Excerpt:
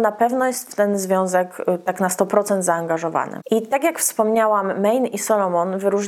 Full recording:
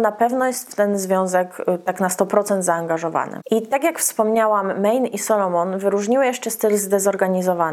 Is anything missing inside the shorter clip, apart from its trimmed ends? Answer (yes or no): no